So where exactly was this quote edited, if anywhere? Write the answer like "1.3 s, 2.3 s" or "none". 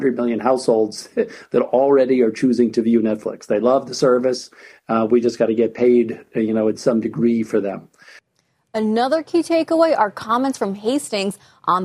none